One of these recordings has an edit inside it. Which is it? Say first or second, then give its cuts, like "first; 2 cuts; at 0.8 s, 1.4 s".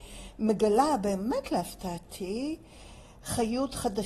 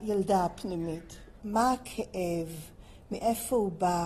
second; 1 cut; at 1.4 s